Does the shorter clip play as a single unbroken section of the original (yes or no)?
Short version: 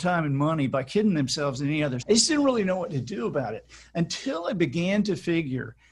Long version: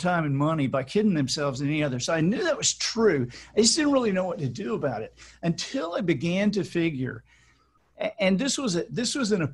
no